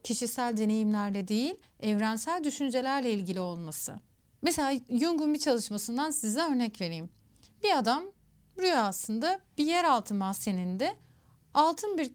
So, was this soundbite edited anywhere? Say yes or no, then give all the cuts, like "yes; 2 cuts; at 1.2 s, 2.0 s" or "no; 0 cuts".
no; 0 cuts